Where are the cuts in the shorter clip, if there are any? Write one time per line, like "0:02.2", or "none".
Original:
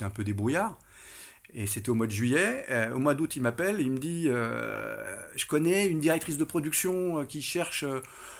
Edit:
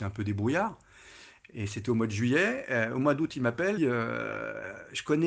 0:03.8